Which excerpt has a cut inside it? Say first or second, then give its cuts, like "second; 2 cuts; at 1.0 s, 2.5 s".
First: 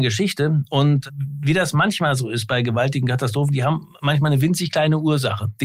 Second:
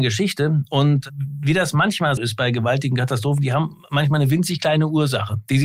second; 1 cut; at 2.2 s